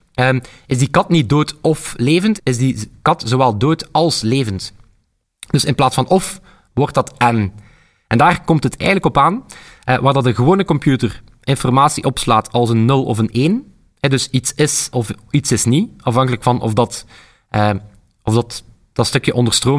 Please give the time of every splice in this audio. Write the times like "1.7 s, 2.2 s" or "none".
none